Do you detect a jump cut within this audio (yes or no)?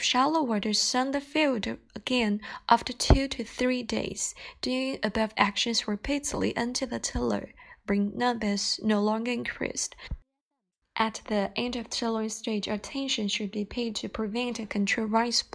no